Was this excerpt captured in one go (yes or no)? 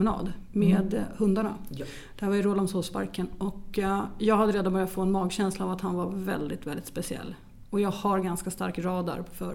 yes